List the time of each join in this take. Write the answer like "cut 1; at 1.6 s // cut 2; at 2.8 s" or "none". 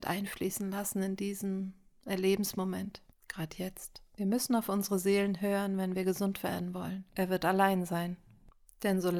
cut 1; at 7.1 s

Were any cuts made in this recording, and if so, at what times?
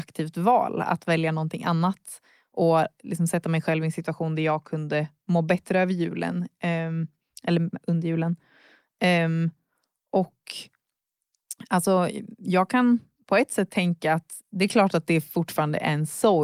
none

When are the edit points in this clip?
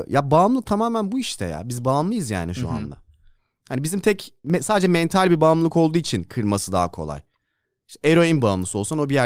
none

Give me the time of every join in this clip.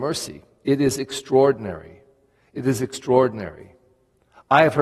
none

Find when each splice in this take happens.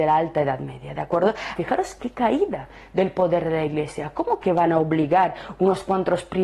cut 1; at 1.6 s

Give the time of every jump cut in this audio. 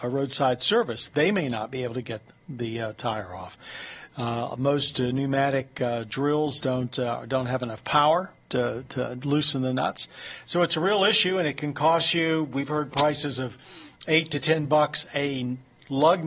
none

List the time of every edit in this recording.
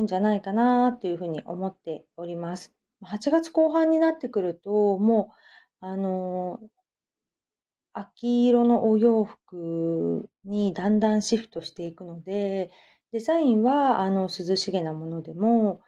cut 1; at 2.9 s

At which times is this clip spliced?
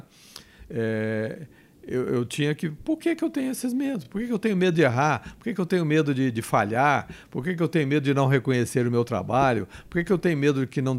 none

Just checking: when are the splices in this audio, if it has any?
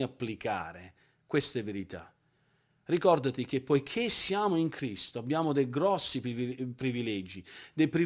none

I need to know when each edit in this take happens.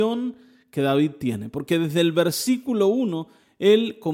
none

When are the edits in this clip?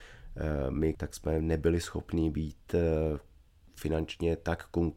cut 1; at 1.0 s

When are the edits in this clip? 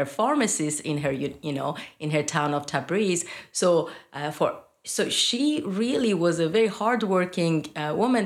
none

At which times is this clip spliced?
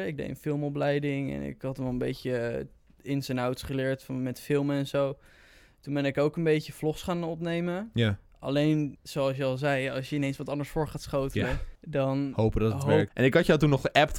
cut 1; at 9.0 s // cut 2; at 11.8 s // cut 3; at 13.1 s

